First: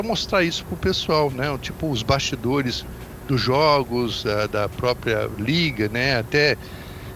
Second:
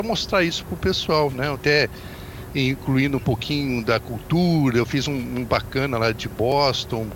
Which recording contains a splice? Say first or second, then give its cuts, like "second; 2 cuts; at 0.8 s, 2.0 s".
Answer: second; 1 cut; at 1.5 s